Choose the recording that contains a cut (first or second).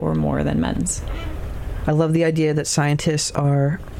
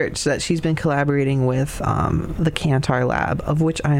first